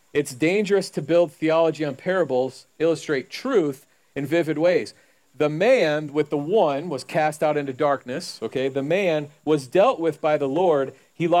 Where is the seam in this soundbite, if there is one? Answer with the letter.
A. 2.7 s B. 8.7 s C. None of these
A